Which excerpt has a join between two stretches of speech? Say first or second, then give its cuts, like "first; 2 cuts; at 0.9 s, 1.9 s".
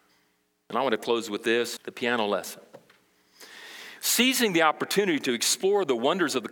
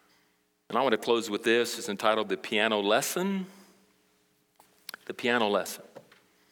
first; 2 cuts; at 1.8 s, 4.0 s